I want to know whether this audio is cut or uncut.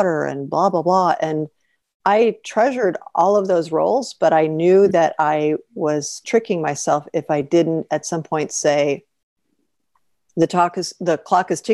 uncut